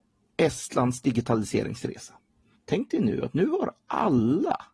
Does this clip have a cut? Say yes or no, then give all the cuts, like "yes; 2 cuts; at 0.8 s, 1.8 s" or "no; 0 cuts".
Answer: yes; 1 cut; at 2.6 s